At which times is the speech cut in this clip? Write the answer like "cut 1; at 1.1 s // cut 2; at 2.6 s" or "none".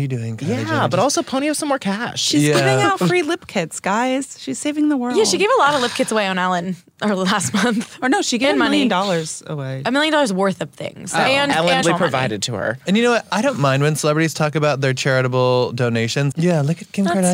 cut 1; at 11.8 s // cut 2; at 16.3 s